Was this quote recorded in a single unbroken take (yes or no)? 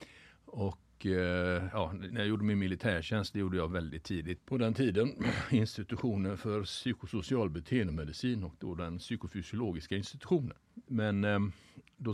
no